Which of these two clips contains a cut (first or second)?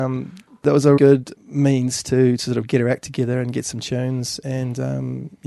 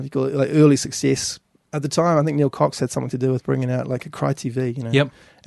first